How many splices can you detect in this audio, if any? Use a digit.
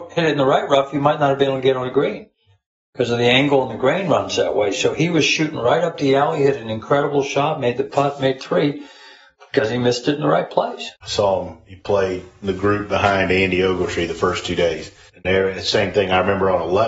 2